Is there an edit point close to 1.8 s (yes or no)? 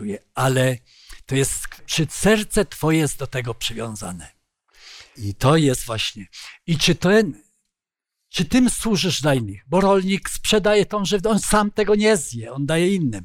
yes